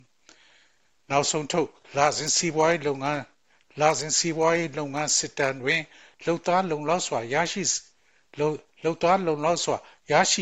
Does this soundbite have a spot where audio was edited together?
no; 0 cuts

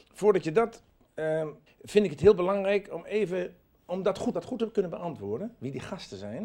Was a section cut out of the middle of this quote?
yes; 2 cuts; at 1.7 s, 4.3 s

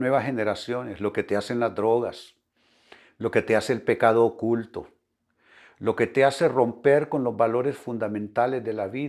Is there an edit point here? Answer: no; 0 cuts

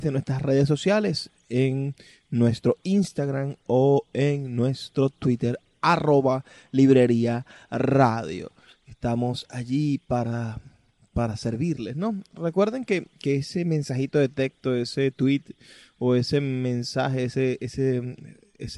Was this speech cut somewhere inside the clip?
no; 0 cuts

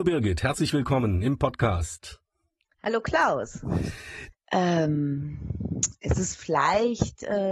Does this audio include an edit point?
yes; 1 cut; at 4.3 s

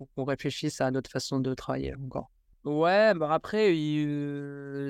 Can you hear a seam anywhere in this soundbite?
yes; 1 cut; at 2.5 s

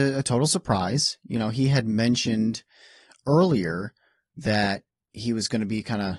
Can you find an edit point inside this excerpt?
no; 0 cuts

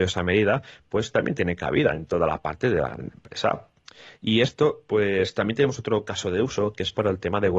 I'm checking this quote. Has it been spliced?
no; 0 cuts

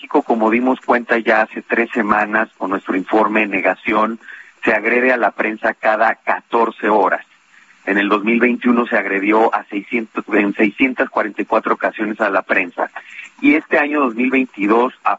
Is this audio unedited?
yes; 0 cuts

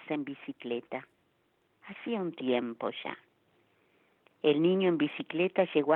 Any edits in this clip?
yes; 1 cut; at 1.7 s

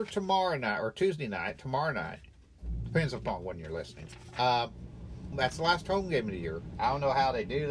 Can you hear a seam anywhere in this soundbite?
yes; 2 cuts; at 5.3 s, 6.7 s

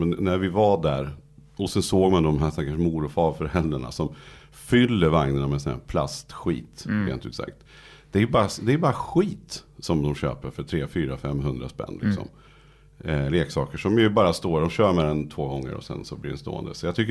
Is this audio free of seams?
yes; 0 cuts

